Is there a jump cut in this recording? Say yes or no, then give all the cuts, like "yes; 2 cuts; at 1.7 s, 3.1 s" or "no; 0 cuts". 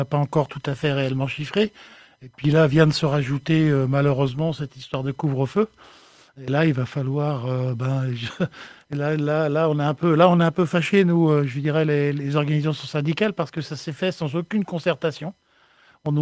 no; 0 cuts